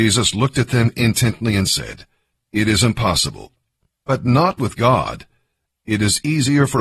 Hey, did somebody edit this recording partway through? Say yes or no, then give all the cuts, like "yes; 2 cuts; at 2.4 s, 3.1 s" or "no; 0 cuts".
yes; 2 cuts; at 2.3 s, 5.8 s